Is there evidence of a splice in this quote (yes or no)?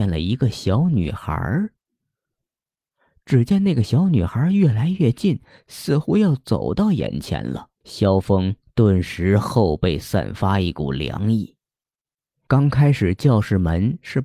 yes